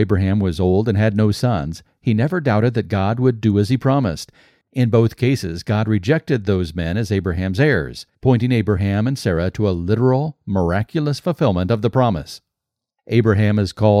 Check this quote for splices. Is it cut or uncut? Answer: cut